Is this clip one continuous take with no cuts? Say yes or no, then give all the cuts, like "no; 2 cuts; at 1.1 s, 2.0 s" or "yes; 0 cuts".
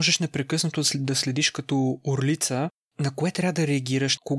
yes; 0 cuts